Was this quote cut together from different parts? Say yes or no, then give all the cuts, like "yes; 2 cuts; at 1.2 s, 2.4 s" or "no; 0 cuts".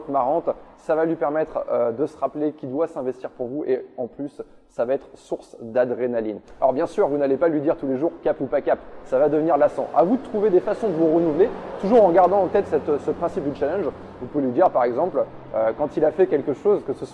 no; 0 cuts